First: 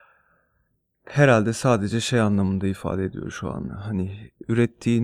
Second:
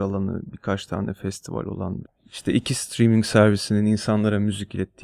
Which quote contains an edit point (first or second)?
second